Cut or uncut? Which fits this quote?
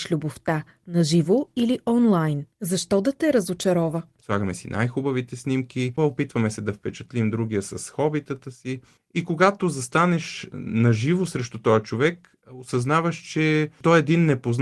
cut